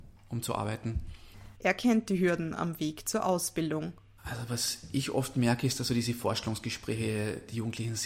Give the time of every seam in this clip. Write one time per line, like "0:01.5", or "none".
0:01.6